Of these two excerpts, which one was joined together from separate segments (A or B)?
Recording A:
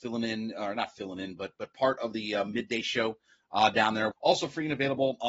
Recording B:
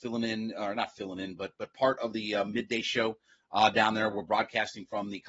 A